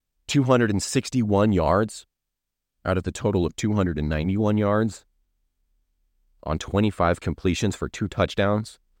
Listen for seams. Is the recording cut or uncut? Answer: uncut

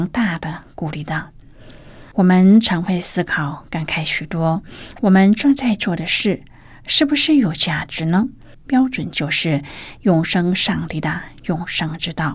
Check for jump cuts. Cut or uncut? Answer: cut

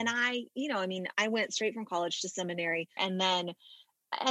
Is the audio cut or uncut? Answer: cut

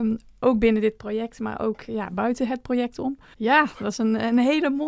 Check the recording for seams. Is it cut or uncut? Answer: cut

